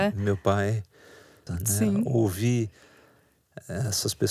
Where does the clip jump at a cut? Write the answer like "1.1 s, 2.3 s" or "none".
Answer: 1.5 s